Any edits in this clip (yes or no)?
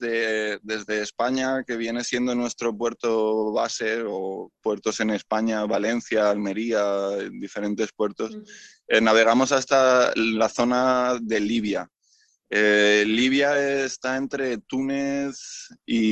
no